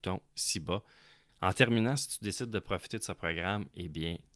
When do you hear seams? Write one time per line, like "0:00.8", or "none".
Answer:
0:01.3